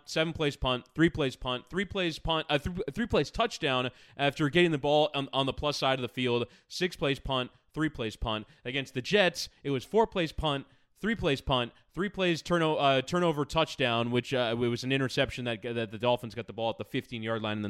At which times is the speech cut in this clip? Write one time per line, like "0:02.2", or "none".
none